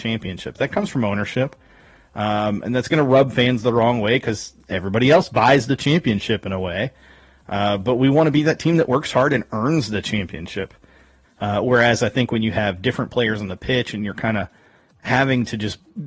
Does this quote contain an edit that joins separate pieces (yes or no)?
yes